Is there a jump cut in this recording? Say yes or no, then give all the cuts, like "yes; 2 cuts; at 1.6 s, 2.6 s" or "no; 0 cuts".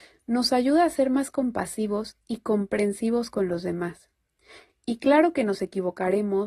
no; 0 cuts